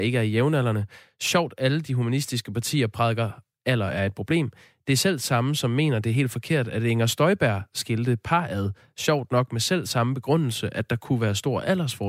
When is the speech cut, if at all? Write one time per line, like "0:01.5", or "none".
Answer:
none